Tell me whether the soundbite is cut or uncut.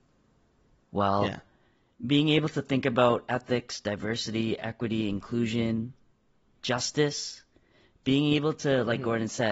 uncut